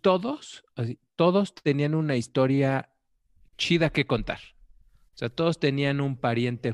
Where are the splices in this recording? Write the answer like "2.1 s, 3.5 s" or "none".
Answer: none